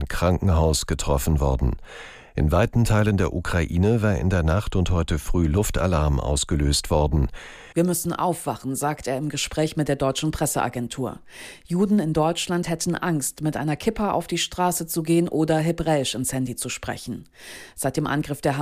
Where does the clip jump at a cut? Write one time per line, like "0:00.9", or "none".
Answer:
0:07.7